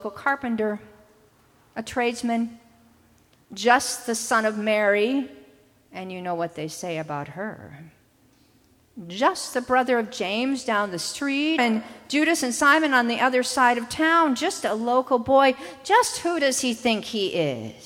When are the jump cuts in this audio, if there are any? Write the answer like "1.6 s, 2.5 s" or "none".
11.6 s